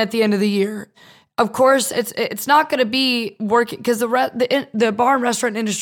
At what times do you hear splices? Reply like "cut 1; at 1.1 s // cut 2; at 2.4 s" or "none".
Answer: none